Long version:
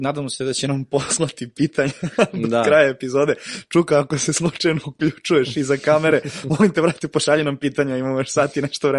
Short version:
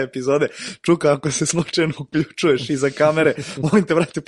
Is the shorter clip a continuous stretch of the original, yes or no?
yes